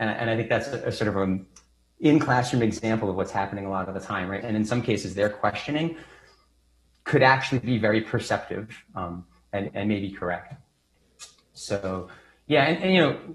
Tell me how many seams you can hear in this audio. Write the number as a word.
one